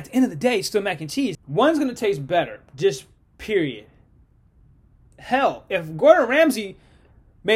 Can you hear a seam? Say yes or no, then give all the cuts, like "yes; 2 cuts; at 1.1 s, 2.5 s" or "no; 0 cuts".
yes; 1 cut; at 1.3 s